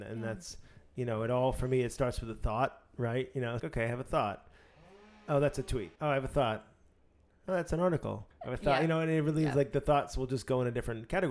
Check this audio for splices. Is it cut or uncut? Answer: cut